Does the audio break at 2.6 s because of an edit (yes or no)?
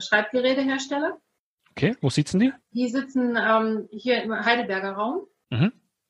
yes